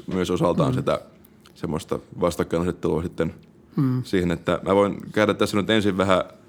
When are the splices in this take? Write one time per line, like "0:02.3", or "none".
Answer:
none